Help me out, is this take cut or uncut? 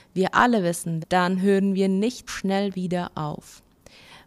cut